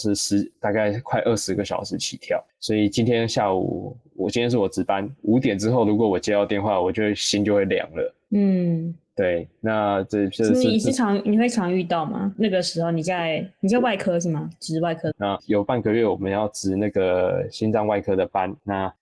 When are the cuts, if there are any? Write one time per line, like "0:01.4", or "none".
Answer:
0:08.3
0:15.1